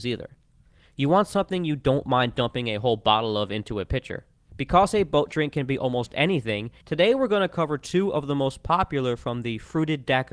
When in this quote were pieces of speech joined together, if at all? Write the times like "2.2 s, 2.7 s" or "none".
4.5 s, 6.8 s